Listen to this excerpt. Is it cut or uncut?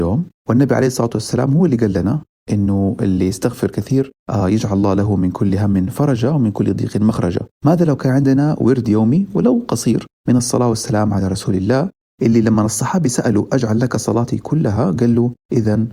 uncut